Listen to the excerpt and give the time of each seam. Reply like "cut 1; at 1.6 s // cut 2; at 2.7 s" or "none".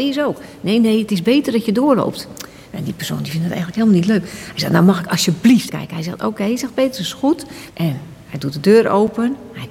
cut 1; at 5.7 s // cut 2; at 7.7 s